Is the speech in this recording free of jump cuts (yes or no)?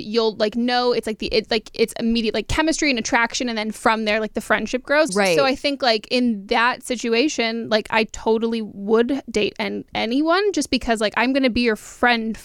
no